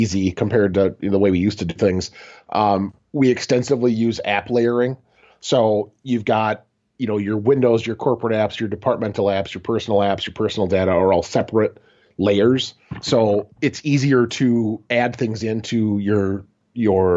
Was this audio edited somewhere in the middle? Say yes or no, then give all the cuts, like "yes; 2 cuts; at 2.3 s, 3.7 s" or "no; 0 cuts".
no; 0 cuts